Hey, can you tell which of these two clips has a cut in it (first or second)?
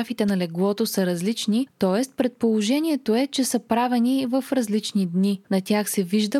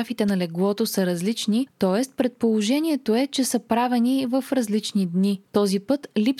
first